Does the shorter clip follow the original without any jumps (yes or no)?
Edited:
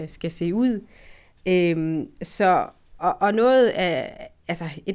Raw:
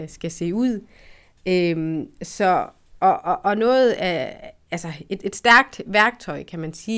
no